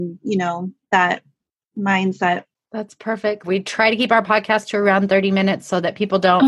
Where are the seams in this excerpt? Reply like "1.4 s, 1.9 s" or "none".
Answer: 3.4 s